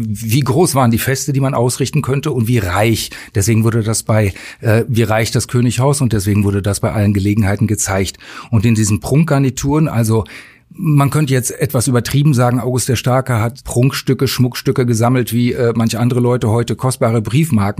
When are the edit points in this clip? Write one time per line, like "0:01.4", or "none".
none